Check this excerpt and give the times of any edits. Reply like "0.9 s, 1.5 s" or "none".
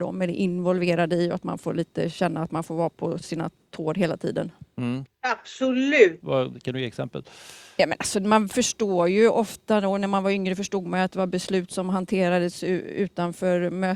5.1 s, 6.2 s